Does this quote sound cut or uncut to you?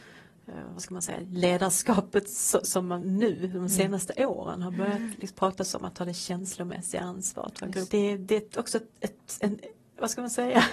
cut